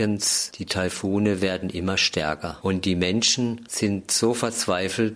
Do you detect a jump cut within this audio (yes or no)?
no